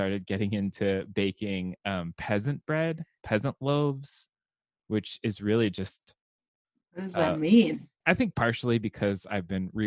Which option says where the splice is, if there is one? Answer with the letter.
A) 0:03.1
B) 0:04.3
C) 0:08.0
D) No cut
C